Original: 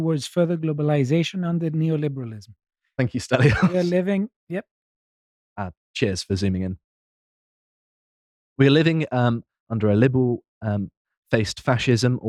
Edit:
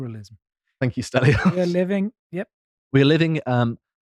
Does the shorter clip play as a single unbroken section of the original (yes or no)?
no